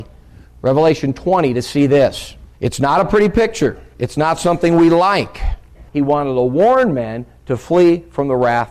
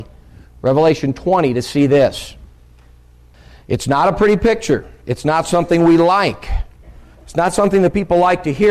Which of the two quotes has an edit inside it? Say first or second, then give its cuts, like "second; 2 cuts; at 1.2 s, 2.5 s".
first; 2 cuts; at 2.5 s, 5.9 s